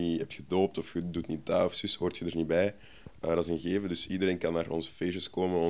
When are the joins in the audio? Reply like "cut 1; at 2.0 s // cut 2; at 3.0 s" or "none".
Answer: cut 1; at 3.2 s